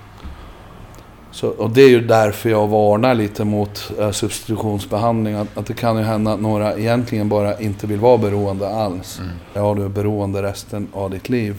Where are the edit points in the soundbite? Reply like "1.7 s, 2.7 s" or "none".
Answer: 9.6 s